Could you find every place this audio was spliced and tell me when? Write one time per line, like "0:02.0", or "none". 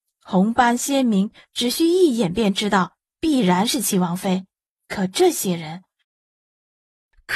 0:04.8
0:06.0